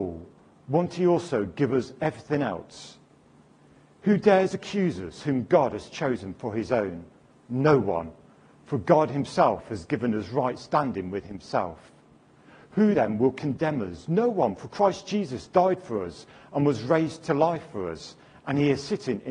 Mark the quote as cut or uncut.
uncut